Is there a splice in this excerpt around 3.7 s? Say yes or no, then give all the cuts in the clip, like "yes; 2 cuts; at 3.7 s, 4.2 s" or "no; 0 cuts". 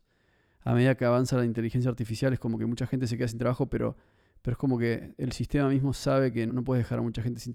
no; 1 cut; at 6.5 s